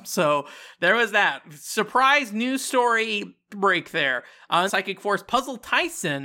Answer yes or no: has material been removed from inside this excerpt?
yes